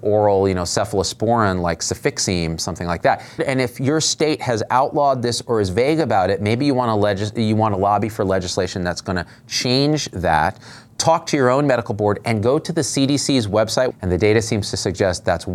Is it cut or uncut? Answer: cut